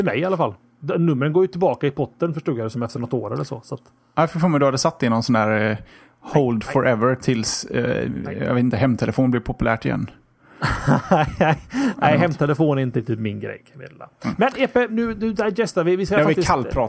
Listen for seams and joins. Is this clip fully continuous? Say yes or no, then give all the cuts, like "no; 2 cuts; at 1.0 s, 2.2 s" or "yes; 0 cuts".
no; 1 cut; at 14.9 s